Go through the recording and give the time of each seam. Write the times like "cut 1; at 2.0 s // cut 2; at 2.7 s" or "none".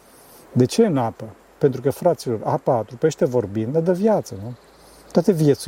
none